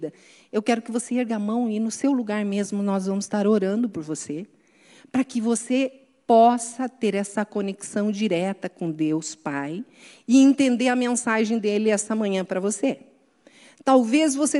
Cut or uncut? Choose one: uncut